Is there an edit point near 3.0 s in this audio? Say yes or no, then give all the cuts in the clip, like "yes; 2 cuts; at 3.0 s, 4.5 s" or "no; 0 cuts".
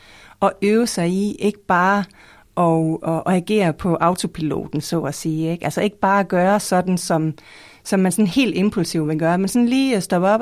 no; 0 cuts